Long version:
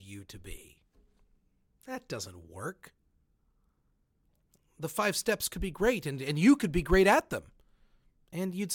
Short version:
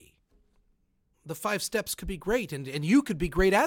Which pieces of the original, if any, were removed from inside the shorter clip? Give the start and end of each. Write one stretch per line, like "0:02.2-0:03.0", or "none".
0:01.8-0:04.7